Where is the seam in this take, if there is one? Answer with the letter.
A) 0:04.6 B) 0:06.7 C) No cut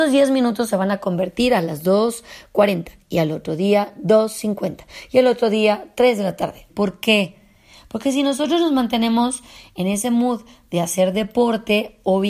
B